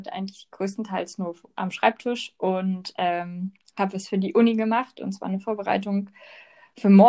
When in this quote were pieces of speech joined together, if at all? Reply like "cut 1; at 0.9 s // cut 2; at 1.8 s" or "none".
none